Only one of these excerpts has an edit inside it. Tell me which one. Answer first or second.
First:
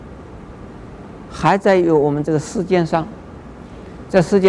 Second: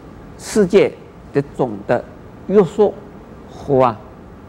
second